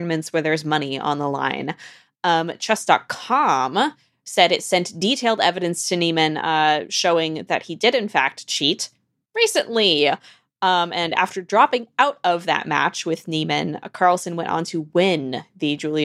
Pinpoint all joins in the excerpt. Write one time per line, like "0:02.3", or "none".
none